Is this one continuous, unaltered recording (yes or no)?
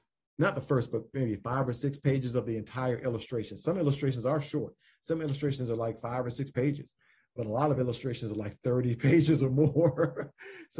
yes